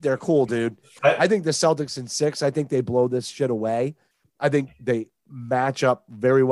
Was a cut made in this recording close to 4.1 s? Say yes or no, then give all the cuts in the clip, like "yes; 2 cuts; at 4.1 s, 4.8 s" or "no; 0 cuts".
no; 1 cut; at 1.0 s